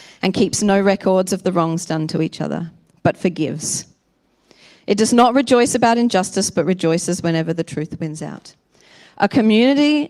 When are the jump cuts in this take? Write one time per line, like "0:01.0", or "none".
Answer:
none